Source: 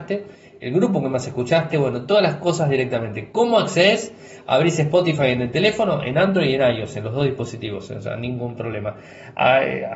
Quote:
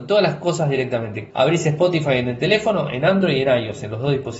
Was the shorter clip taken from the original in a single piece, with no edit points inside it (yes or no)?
no